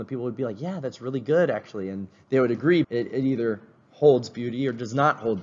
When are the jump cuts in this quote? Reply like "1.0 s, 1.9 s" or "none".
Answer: 2.8 s